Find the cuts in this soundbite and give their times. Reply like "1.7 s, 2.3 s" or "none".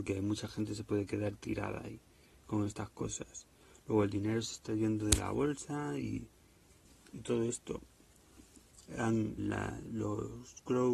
9.4 s